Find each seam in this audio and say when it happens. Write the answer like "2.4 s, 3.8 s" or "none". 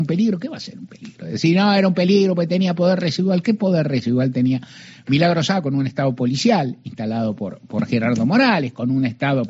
none